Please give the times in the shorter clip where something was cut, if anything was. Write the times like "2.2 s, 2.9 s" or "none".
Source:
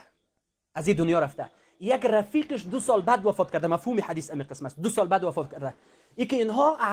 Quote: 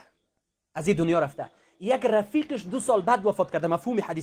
none